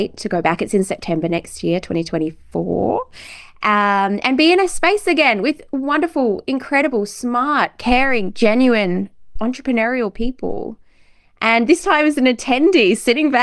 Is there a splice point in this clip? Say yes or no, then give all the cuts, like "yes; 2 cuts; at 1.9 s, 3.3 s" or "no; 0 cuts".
no; 0 cuts